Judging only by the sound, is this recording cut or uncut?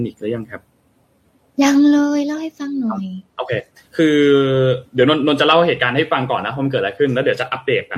uncut